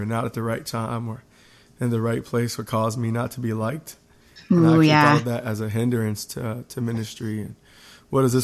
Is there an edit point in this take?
no; 0 cuts

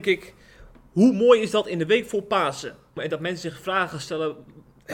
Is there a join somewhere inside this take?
yes; 1 cut; at 3.0 s

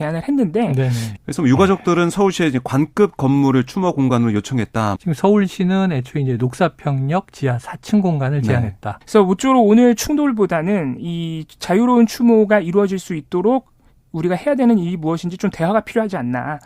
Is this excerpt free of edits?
no; 3 cuts; at 1.2 s, 5.0 s, 9.0 s

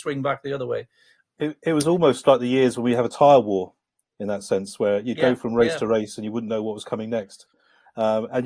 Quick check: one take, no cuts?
no; 1 cut; at 1.2 s

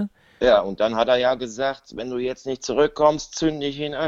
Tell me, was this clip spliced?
no; 0 cuts

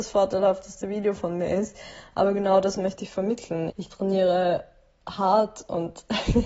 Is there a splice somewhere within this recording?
yes; 1 cut; at 3.7 s

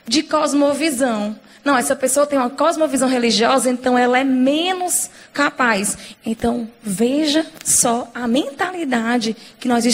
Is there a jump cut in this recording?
yes; 1 cut; at 6.1 s

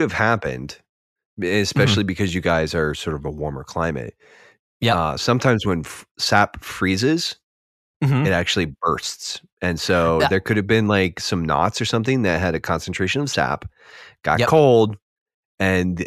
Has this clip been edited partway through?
no; 0 cuts

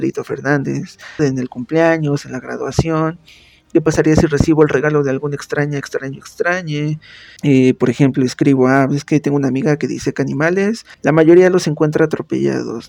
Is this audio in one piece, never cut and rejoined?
no; 3 cuts; at 1.2 s, 7.4 s, 10.9 s

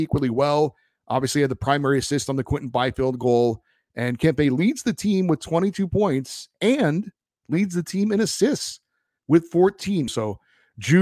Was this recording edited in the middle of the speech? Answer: yes; 1 cut; at 10.1 s

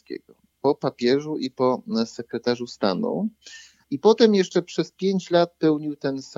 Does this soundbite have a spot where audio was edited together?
yes; 1 cut; at 3.8 s

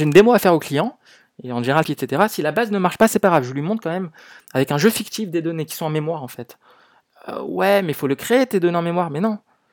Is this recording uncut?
no; 1 cut; at 1.8 s

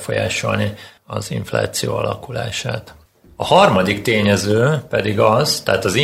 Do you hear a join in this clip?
no; 0 cuts

